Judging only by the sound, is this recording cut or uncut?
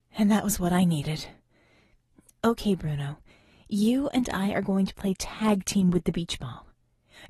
uncut